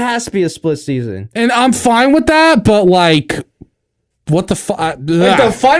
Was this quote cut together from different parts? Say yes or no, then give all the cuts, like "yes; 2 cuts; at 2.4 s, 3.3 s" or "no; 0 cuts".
no; 0 cuts